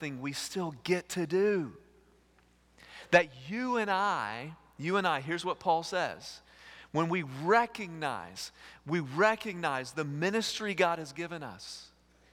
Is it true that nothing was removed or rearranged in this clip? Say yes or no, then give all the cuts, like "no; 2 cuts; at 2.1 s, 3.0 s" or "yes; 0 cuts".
yes; 0 cuts